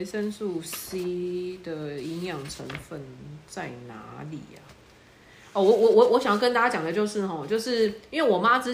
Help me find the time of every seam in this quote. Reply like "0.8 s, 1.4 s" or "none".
none